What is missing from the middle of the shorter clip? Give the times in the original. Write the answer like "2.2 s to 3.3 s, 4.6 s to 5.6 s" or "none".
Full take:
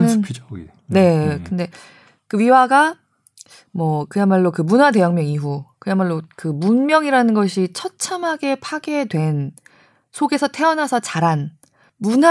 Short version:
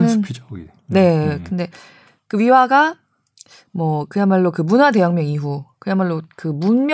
none